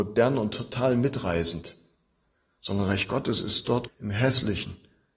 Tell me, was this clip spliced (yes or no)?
yes